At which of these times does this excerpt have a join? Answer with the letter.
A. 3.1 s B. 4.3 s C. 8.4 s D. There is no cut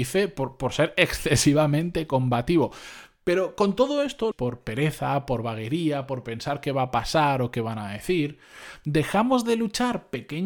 B